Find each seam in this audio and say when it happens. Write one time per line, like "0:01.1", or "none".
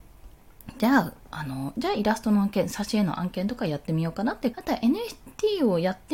0:01.7
0:04.5